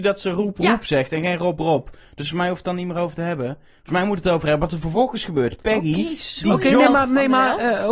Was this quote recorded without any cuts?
yes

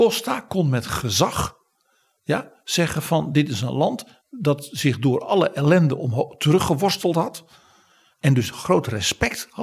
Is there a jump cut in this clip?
no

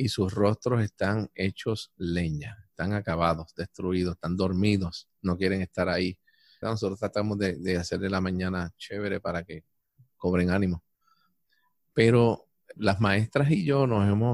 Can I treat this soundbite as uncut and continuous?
no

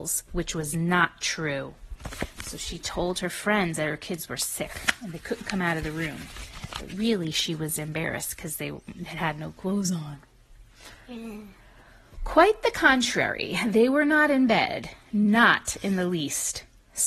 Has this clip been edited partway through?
no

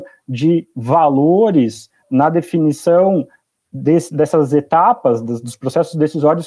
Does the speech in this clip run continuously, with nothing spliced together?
yes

